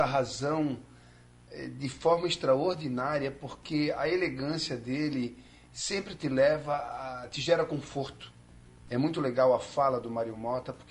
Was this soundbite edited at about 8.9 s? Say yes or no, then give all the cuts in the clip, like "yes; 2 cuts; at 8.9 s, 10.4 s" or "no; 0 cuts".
yes; 1 cut; at 8.9 s